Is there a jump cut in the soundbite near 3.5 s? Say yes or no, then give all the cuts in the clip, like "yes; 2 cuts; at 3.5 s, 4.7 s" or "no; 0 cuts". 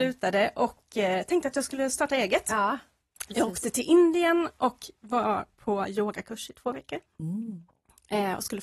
no; 0 cuts